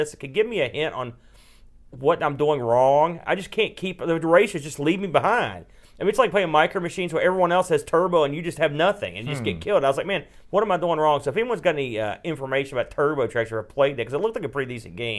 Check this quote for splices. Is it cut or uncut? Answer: uncut